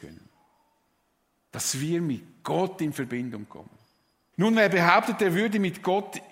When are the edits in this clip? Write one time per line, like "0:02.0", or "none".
0:04.3